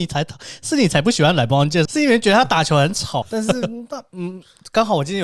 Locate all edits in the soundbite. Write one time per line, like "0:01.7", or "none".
0:01.9
0:03.2